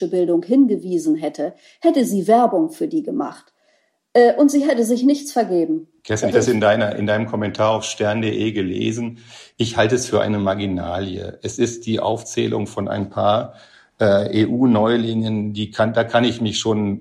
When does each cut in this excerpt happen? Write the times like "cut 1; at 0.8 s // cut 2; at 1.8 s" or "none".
cut 1; at 6.3 s